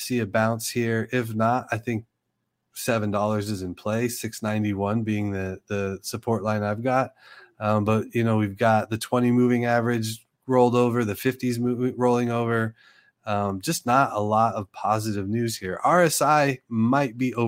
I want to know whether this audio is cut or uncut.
uncut